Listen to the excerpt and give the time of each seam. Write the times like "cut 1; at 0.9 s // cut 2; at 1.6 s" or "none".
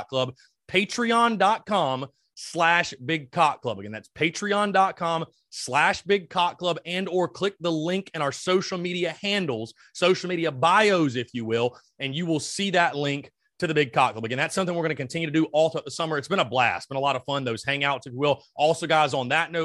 none